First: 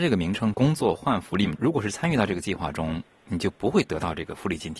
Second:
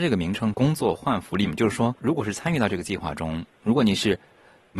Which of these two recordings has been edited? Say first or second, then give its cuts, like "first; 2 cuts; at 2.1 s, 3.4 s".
first; 2 cuts; at 1.5 s, 3.1 s